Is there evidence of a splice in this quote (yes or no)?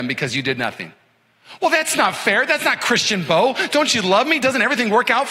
no